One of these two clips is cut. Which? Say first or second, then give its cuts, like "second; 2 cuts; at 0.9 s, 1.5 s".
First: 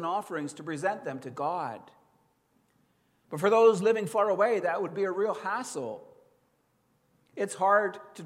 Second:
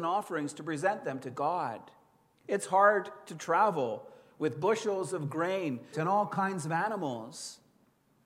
second; 2 cuts; at 2.3 s, 5.9 s